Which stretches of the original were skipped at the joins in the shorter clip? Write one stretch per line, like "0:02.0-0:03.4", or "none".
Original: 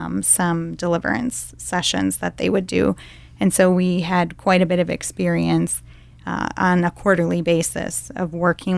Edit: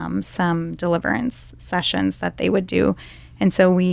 none